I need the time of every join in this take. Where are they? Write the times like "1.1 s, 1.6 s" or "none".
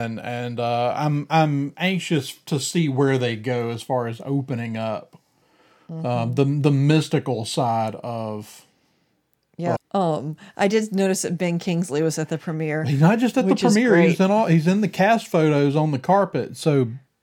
9.8 s